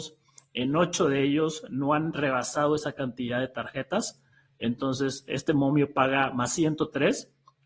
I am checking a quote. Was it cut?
no; 0 cuts

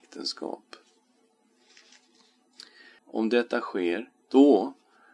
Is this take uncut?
no; 1 cut; at 3.0 s

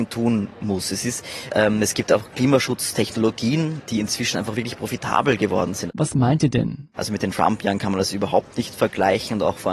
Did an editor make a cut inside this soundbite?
yes; 2 cuts; at 5.9 s, 6.9 s

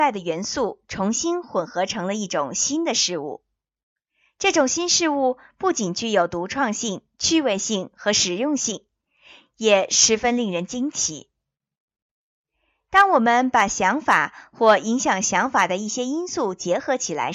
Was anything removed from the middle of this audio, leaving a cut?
no; 0 cuts

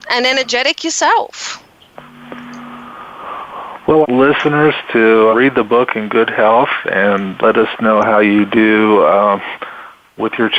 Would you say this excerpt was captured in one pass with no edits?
no; 3 cuts; at 4.0 s, 5.3 s, 7.4 s

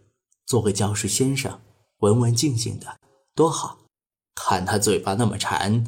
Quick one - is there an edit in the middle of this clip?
no; 0 cuts

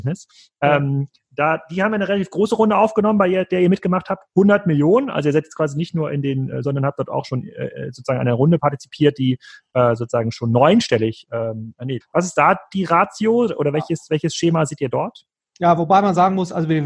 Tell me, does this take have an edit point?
yes; 2 cuts; at 6.6 s, 12.0 s

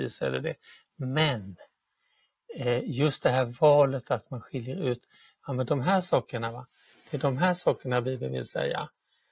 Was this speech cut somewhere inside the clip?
no; 0 cuts

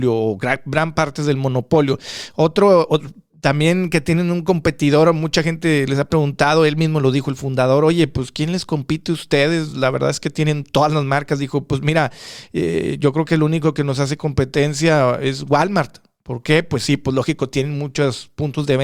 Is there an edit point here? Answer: no; 0 cuts

